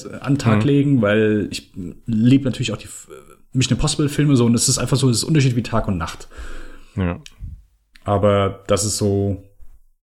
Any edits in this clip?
no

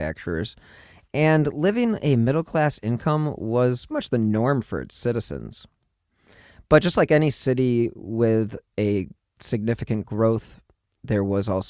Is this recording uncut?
no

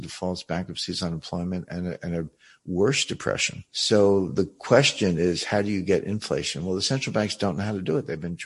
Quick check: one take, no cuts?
yes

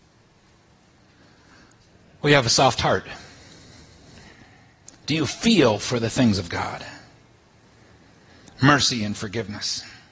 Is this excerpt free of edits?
no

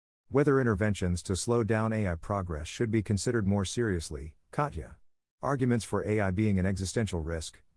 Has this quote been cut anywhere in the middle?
no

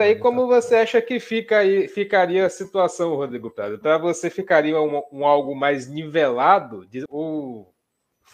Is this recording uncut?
no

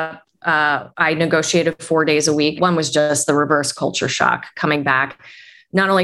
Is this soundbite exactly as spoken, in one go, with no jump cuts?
no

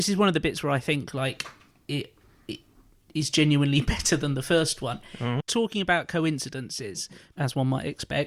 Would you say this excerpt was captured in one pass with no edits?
no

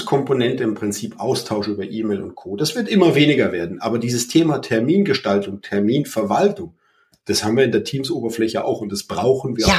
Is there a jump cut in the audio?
no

